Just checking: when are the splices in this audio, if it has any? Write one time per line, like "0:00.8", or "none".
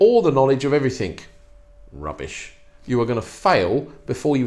none